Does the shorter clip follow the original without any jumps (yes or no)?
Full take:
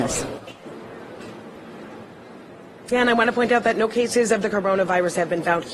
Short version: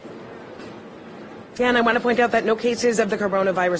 no